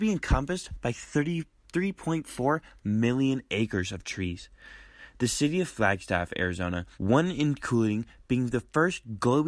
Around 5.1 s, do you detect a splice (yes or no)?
no